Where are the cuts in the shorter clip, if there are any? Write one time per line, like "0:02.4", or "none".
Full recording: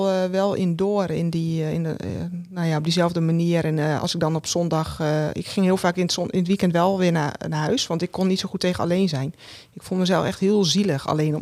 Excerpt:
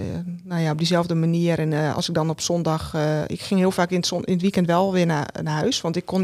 none